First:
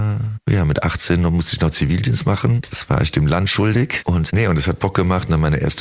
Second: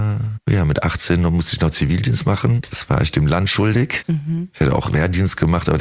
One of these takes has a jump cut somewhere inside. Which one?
first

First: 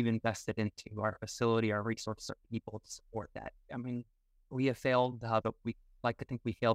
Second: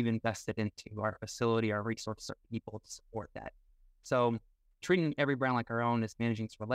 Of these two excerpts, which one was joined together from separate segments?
first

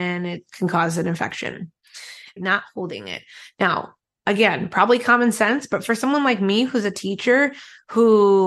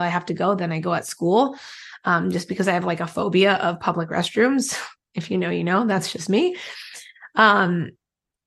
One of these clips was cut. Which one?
first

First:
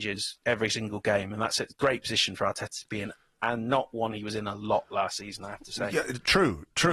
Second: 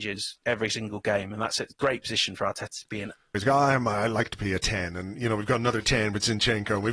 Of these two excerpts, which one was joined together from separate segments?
second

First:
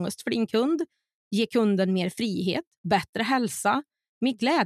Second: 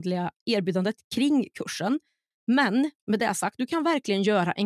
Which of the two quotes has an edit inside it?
second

